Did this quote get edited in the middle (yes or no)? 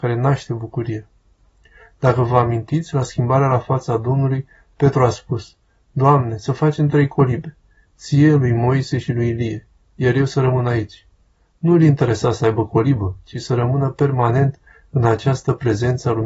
no